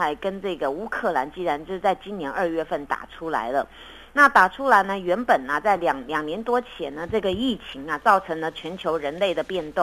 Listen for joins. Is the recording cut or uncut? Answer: uncut